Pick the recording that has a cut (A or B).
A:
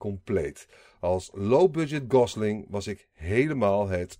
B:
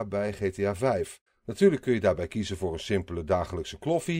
B